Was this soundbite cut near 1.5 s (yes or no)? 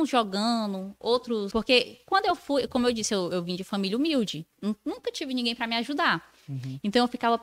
yes